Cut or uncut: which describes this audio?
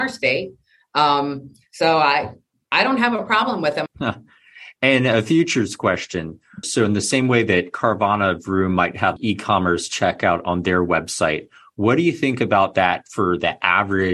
cut